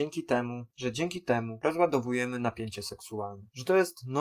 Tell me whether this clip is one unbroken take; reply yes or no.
yes